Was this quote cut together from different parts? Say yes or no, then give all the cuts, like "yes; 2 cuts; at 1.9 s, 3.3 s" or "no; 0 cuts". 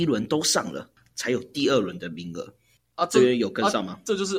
no; 0 cuts